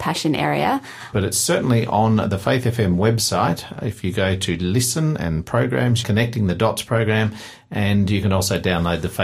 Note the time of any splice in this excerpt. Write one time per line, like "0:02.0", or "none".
0:01.1
0:06.0

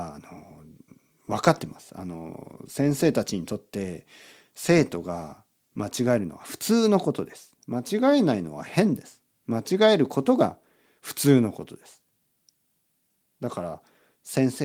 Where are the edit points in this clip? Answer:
none

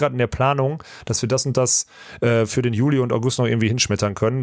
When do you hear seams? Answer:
none

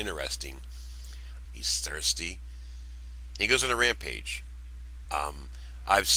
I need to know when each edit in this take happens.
0:01.4
0:05.0

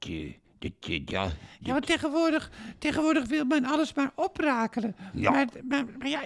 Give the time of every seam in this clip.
none

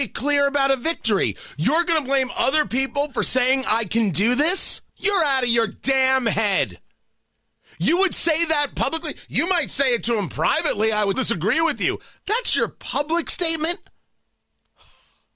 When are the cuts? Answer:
0:04.9
0:11.1

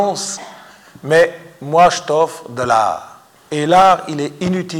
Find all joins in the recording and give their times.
0:03.4

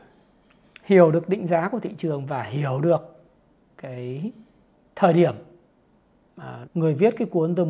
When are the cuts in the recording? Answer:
0:06.6

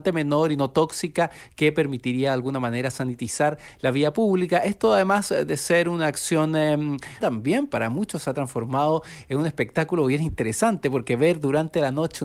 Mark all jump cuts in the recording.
0:07.2

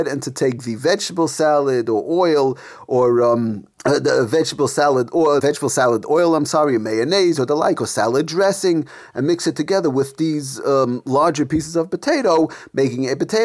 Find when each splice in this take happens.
0:03.7
0:05.4

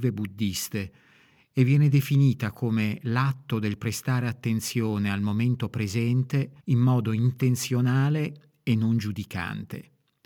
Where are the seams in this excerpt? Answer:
0:06.6

